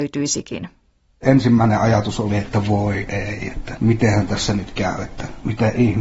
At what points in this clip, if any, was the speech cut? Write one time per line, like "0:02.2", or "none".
none

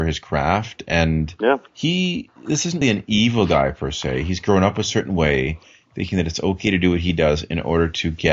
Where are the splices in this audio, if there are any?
0:01.7
0:02.8

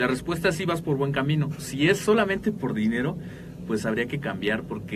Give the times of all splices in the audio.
none

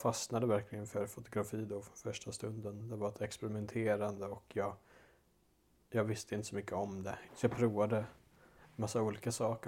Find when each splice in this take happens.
0:07.3

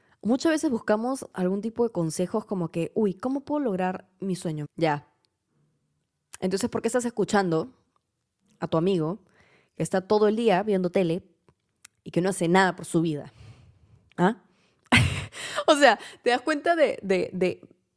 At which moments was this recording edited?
0:04.6

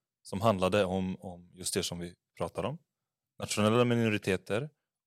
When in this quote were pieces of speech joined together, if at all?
none

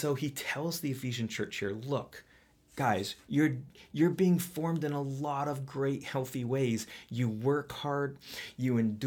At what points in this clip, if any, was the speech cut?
none

